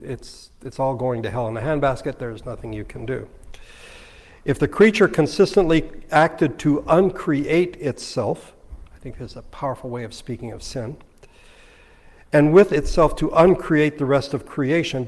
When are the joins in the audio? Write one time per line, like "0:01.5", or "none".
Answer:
none